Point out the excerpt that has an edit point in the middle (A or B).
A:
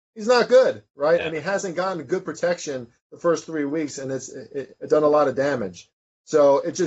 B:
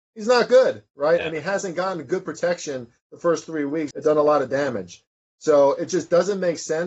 B